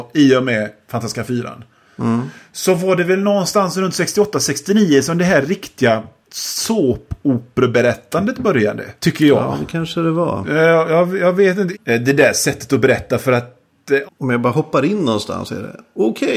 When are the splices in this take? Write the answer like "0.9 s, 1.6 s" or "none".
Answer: 9.0 s, 11.7 s, 14.1 s